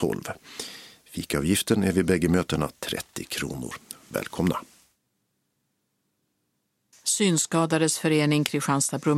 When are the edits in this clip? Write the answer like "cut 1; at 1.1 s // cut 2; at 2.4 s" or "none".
none